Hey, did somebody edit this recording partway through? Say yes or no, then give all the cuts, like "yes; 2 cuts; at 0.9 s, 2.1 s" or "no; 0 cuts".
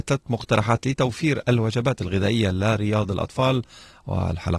no; 0 cuts